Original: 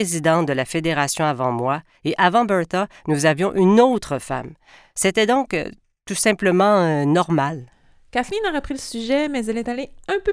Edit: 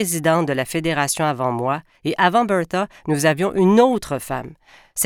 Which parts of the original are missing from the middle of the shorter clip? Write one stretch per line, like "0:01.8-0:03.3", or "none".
none